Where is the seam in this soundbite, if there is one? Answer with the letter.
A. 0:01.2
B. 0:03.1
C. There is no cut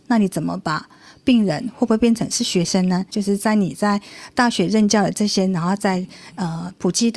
B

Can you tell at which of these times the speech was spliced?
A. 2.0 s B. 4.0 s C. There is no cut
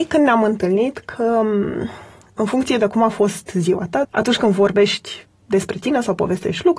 B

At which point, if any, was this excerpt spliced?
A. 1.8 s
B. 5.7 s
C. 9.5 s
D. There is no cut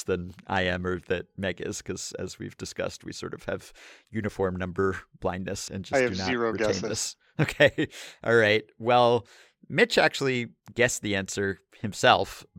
B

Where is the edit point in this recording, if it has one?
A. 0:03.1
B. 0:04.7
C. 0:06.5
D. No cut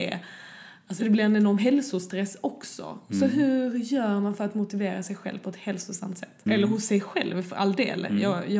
C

